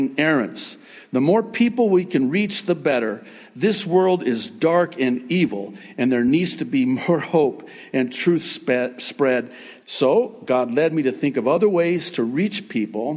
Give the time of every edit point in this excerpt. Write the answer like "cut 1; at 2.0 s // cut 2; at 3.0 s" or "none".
cut 1; at 9.8 s